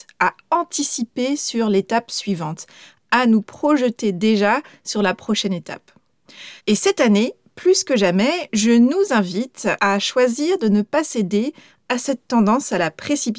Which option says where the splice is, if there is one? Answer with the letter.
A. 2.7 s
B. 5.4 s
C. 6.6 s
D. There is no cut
C